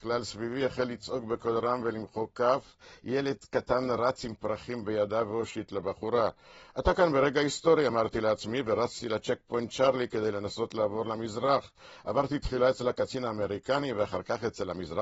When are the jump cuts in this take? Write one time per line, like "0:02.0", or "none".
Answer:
none